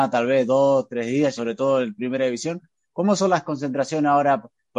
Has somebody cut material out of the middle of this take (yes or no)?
yes